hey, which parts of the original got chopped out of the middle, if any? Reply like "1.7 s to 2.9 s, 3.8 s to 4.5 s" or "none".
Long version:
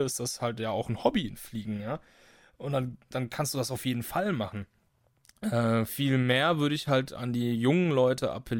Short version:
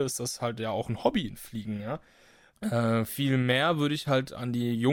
2.5 s to 5.3 s